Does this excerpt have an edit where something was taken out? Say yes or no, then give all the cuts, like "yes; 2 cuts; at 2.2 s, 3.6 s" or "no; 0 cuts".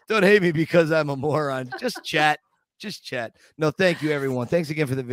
yes; 1 cut; at 1.7 s